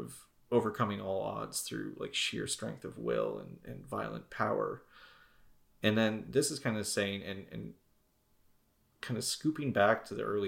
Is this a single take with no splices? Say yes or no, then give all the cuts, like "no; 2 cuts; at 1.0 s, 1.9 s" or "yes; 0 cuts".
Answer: yes; 0 cuts